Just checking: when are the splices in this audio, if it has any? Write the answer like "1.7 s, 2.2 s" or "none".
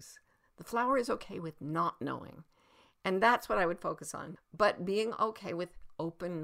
4.4 s